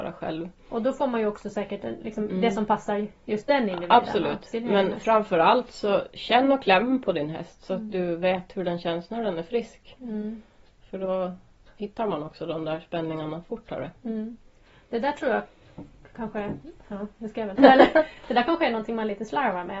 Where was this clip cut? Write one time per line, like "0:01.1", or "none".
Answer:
0:17.6